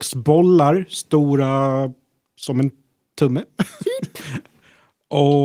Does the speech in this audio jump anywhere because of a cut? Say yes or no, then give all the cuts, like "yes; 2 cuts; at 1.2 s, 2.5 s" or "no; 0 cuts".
no; 0 cuts